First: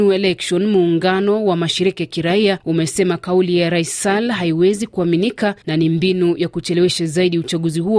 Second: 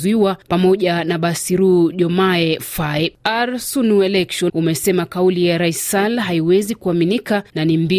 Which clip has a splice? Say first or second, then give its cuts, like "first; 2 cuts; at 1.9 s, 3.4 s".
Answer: second; 1 cut; at 4.5 s